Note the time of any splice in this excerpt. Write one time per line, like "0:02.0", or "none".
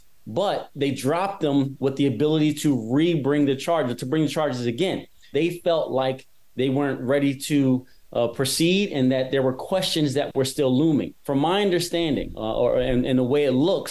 0:05.3
0:11.2